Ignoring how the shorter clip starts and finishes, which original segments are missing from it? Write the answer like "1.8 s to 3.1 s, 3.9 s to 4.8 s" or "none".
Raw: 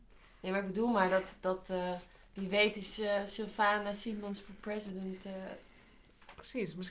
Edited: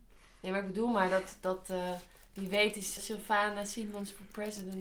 3.0 s to 3.3 s